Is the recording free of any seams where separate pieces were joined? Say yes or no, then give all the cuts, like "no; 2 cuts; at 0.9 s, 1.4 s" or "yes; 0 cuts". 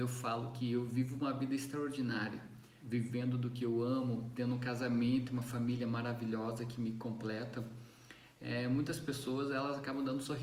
no; 1 cut; at 2.8 s